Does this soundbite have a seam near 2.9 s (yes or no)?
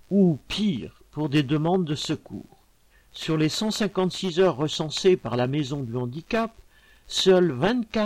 yes